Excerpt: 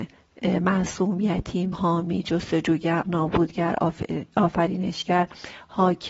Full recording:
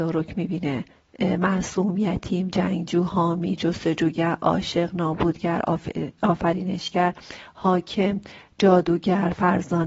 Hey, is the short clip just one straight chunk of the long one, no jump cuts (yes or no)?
no